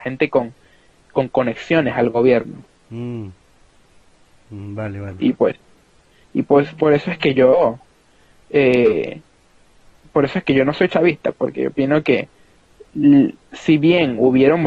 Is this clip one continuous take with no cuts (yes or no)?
yes